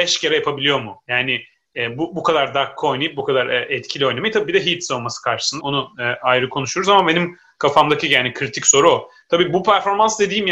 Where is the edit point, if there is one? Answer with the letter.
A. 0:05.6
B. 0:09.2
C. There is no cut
A